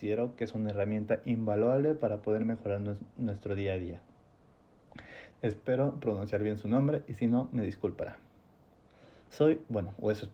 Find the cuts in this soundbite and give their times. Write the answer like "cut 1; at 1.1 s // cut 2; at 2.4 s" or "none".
cut 1; at 5.3 s